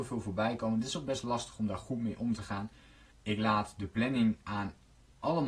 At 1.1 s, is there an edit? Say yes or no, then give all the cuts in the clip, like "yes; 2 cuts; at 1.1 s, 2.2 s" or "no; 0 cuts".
no; 1 cut; at 3.1 s